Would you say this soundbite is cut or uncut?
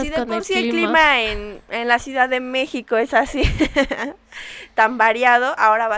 uncut